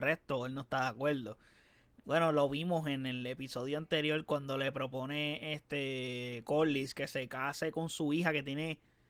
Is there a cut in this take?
no; 0 cuts

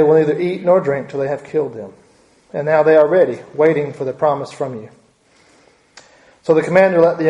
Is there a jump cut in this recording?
no; 0 cuts

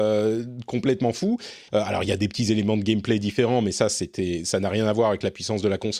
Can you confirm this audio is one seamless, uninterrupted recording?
no; 1 cut; at 1.7 s

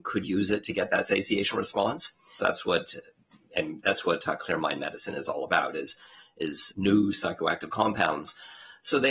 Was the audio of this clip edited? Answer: yes; 2 cuts; at 2.4 s, 6.7 s

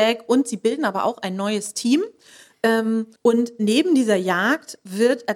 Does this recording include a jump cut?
yes; 1 cut; at 3.2 s

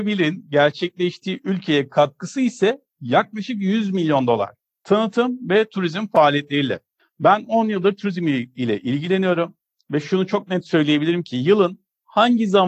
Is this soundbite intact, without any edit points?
no; 1 cut; at 4.7 s

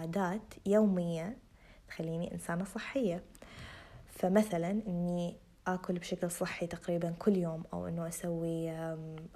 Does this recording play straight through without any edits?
yes; 0 cuts

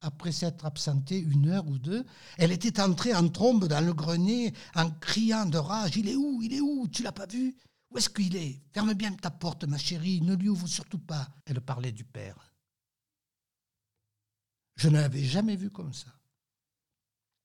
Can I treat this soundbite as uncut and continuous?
no; 1 cut; at 11.4 s

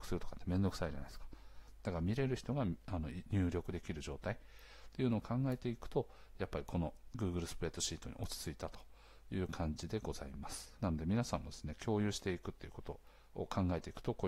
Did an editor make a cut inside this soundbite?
yes; 1 cut; at 10.8 s

